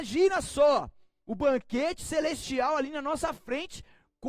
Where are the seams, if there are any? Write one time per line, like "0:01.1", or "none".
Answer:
none

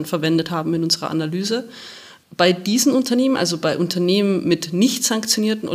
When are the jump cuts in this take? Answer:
none

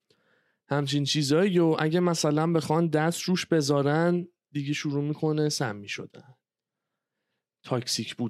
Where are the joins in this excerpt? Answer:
none

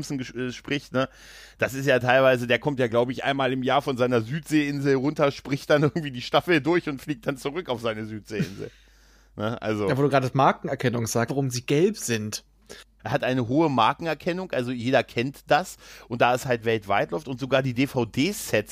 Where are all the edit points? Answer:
0:11.3
0:13.0

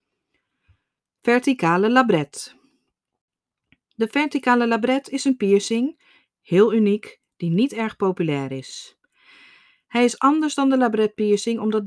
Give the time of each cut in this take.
none

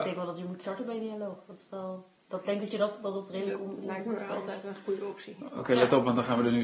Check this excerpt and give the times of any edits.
none

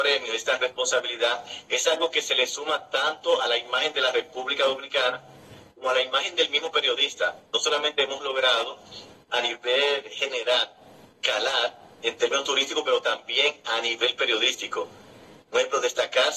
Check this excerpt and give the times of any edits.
none

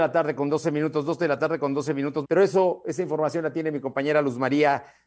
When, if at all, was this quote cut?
0:02.2

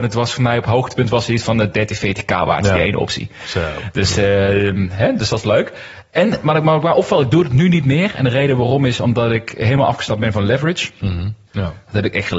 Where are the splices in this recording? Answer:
0:11.5

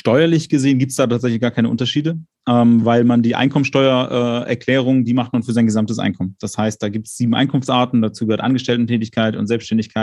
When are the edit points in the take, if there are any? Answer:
none

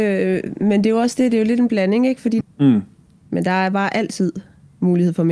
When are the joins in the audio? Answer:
0:02.4

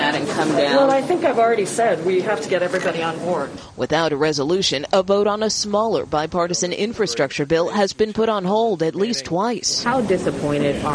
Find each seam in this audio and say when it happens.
none

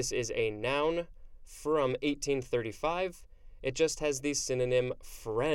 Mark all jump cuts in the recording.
none

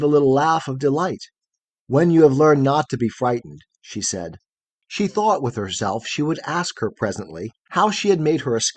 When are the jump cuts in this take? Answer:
0:03.7
0:07.5

